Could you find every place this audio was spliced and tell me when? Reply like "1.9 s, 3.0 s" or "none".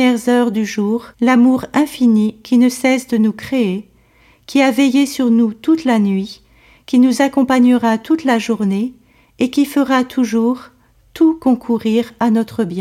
1.1 s